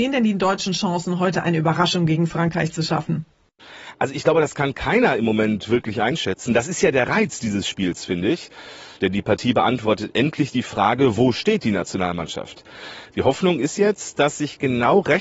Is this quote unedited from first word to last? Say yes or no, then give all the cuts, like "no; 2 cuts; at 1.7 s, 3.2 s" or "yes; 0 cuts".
yes; 0 cuts